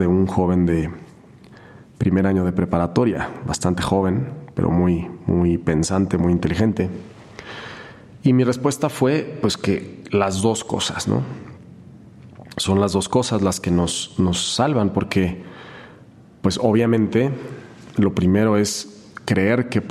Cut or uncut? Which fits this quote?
uncut